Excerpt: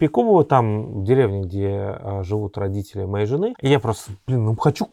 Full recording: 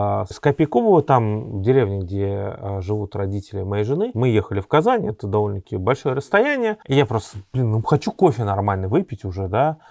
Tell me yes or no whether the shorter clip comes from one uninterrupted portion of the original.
no